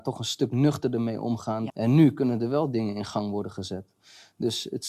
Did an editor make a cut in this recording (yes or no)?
yes